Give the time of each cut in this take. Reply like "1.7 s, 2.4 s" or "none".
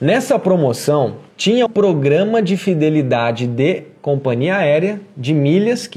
1.7 s